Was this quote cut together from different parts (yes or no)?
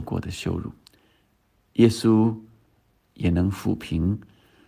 no